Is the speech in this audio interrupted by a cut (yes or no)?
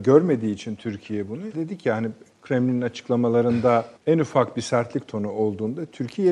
yes